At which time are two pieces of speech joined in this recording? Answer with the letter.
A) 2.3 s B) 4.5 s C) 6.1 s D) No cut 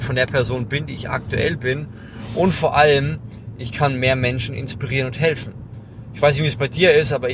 D